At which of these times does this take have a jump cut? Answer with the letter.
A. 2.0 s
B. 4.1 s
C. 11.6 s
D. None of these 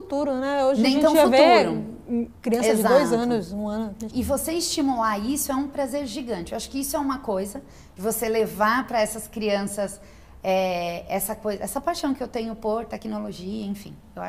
B